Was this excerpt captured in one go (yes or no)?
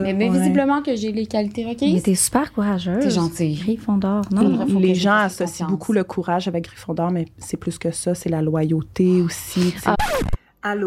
yes